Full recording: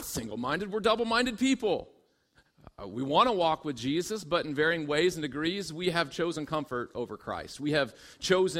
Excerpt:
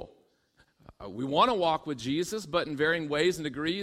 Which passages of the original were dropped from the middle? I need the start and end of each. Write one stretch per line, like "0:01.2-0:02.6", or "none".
none